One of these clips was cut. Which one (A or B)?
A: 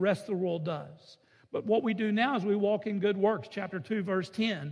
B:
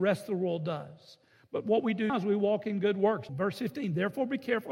B